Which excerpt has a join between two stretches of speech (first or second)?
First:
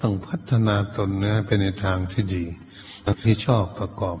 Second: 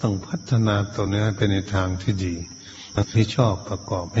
second